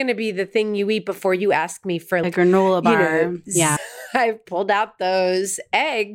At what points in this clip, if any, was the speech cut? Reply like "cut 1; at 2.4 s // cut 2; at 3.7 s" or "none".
cut 1; at 2.2 s // cut 2; at 3.8 s